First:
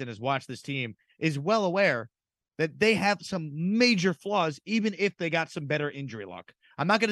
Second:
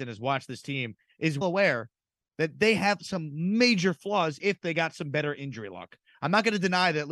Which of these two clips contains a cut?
second; 2 cuts; at 1.4 s, 4.4 s

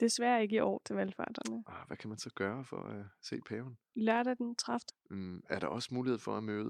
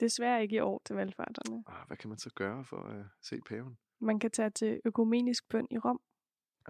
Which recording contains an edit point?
first; 2 cuts; at 3.8 s, 4.9 s

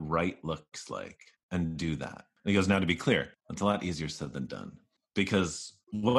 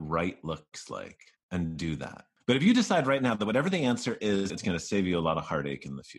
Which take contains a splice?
second; 2 cuts; at 2.4 s, 4.5 s

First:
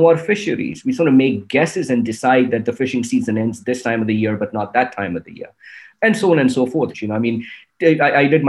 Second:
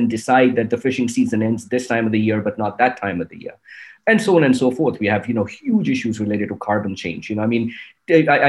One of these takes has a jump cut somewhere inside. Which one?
first; 1 cut; at 6.9 s

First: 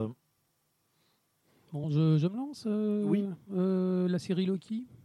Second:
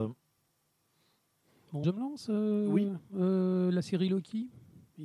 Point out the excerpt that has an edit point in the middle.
second; 1 cut; at 1.8 s

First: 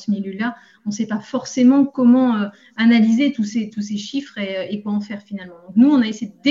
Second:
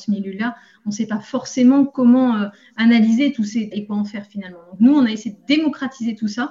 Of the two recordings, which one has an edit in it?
second; 1 cut; at 3.7 s

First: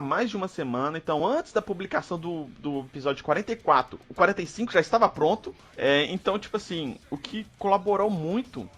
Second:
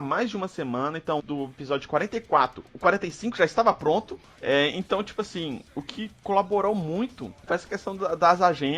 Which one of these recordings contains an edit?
second; 1 cut; at 1.2 s

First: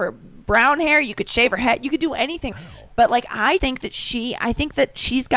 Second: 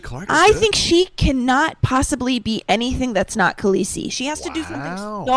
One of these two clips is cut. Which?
first; 2 cuts; at 2.5 s, 3.6 s

